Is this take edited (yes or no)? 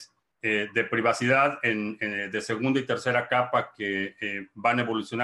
no